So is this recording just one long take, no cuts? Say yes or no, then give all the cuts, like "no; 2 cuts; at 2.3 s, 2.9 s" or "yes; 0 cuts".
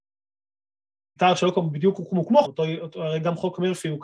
no; 2 cuts; at 1.2 s, 2.4 s